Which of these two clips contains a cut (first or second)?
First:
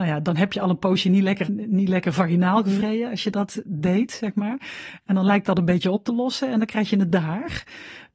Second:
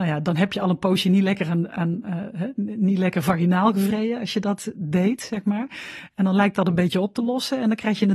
first